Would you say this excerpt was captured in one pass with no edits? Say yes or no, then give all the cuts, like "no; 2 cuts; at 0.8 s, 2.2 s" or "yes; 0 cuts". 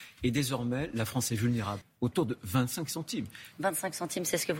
no; 2 cuts; at 1.8 s, 3.5 s